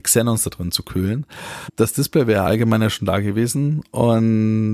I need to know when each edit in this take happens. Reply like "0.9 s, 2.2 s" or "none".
1.7 s